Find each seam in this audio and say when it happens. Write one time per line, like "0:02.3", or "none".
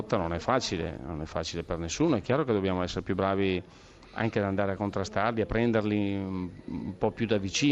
none